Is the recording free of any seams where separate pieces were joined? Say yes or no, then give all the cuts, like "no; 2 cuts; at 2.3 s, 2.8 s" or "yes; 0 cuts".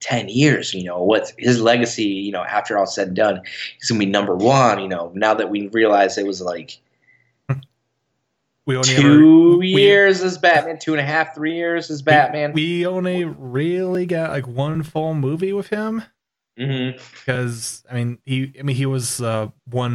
yes; 0 cuts